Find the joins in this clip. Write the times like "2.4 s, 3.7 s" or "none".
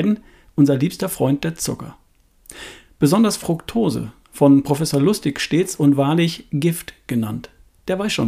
none